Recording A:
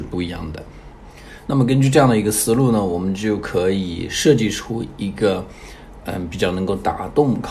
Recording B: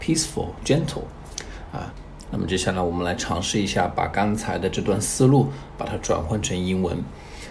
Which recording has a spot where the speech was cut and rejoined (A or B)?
B